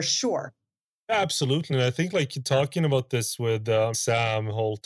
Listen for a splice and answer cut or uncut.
uncut